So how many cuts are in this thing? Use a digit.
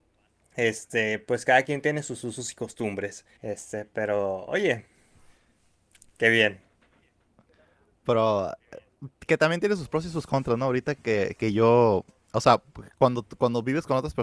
1